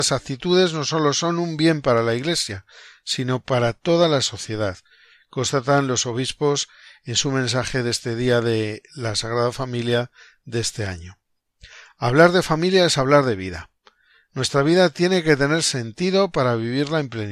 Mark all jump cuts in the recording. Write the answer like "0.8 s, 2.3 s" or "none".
none